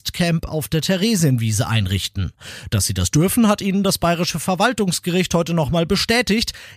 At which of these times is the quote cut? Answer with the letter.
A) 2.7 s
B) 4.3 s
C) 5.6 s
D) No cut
D